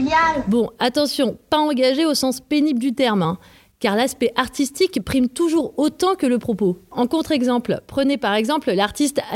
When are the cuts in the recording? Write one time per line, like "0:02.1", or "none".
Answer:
none